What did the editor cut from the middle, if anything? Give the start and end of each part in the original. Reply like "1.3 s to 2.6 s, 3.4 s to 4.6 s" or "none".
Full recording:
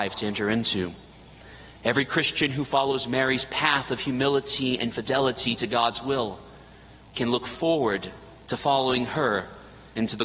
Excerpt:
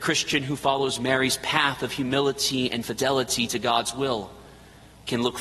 none

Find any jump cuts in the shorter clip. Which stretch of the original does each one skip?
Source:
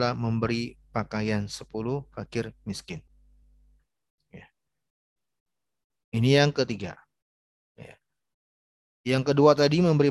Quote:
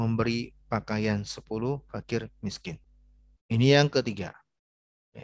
3.6 s to 6.0 s

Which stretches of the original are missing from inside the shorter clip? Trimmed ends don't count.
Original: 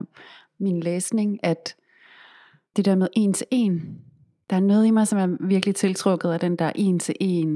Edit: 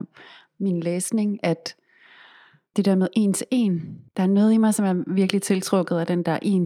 4.1 s to 4.4 s

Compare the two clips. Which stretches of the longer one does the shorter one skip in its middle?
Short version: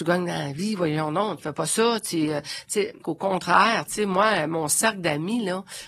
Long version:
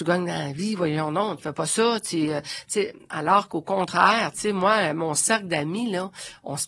3.0 s to 3.5 s

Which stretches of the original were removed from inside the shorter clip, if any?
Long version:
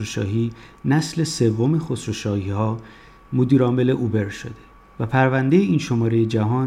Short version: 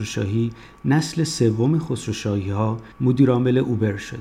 2.9 s to 3.2 s

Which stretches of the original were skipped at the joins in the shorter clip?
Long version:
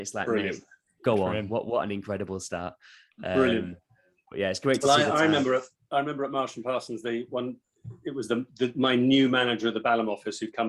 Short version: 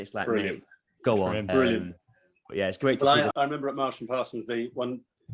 1.5 s to 3.3 s, 5.1 s to 5.9 s

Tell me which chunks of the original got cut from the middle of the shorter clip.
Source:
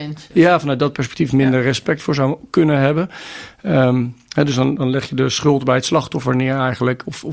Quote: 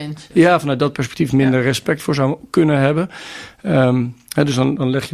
none

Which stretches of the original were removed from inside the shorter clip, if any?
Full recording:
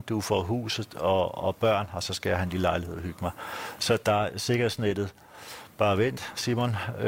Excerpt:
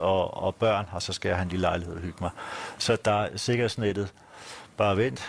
none

